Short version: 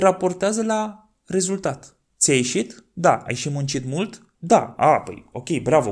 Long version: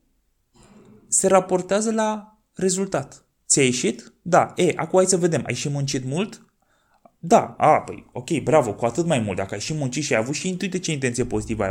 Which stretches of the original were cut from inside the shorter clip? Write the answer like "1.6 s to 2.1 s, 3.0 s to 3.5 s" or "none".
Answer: 4.5 s to 5.4 s, 6.5 s to 7.2 s